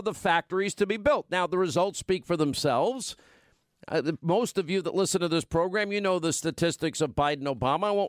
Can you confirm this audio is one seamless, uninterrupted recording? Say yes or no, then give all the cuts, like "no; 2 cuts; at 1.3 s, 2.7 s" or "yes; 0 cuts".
yes; 0 cuts